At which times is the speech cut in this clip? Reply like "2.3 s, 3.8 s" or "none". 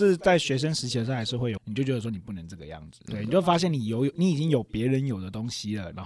1.6 s, 3.1 s